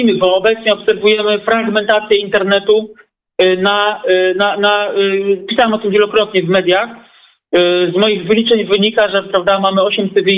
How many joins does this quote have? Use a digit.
0